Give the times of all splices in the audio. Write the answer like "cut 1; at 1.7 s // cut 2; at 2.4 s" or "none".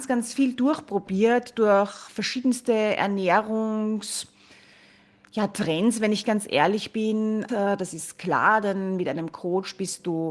cut 1; at 7.5 s